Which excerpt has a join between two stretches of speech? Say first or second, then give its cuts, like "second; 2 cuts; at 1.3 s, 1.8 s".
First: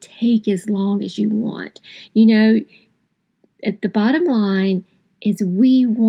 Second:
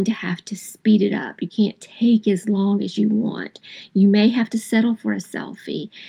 first; 1 cut; at 2.1 s